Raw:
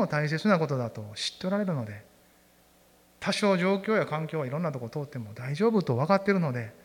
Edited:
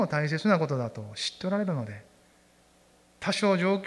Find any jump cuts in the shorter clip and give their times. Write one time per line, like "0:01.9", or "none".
none